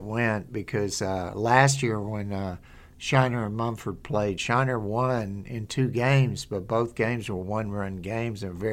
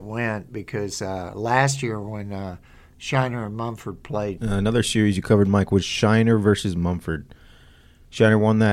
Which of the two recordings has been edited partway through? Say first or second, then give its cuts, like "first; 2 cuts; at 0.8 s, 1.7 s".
second; 1 cut; at 4.4 s